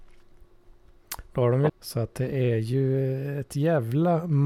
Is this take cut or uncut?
cut